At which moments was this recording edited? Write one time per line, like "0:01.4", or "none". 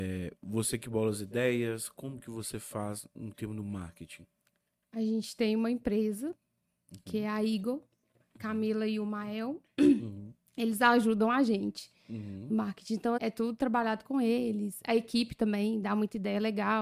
0:13.2